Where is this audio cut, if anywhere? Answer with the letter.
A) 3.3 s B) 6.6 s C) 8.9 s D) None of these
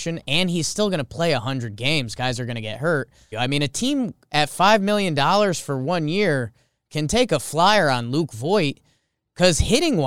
A